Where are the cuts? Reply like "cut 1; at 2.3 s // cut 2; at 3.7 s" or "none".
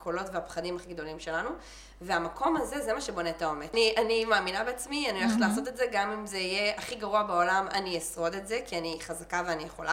cut 1; at 3.7 s

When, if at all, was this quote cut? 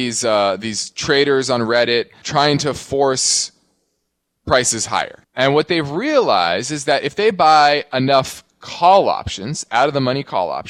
cut 1; at 2.2 s // cut 2; at 5.2 s

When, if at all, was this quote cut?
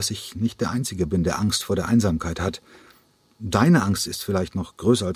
none

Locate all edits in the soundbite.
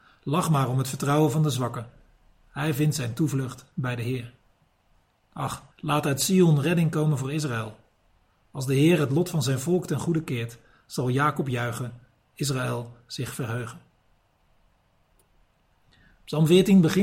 cut 1; at 5.7 s

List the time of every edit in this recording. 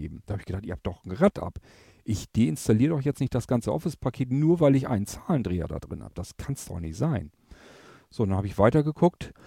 none

